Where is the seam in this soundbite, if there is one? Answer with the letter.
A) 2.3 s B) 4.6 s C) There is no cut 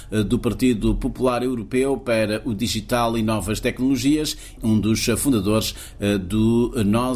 B